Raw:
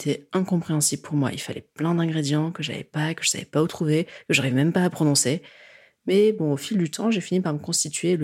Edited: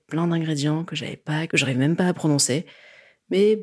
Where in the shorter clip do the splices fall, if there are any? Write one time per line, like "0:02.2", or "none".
0:01.5